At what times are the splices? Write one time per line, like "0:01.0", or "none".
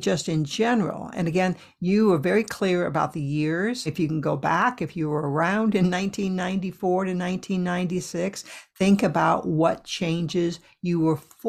0:03.9